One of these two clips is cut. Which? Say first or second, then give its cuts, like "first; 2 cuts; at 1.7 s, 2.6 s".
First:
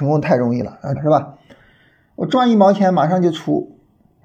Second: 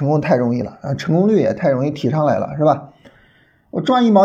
first; 1 cut; at 1.0 s